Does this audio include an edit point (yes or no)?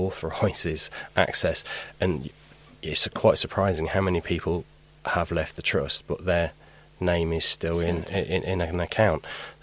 no